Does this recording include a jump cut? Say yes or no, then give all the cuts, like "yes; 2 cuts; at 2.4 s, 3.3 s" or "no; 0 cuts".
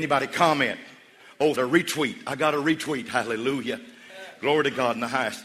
yes; 1 cut; at 1.6 s